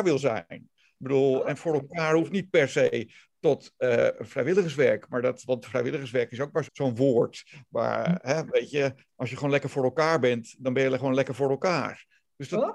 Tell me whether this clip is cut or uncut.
cut